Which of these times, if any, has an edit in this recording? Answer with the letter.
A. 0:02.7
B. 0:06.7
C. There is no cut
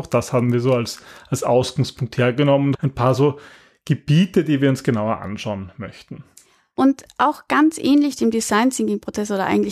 A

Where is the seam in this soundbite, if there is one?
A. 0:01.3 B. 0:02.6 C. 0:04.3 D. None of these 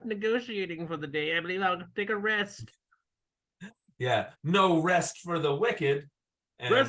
C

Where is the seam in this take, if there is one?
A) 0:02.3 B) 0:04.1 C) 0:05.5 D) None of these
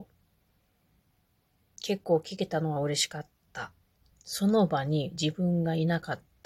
B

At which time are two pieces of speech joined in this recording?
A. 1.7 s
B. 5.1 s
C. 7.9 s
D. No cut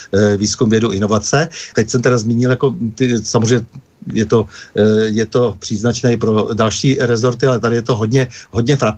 A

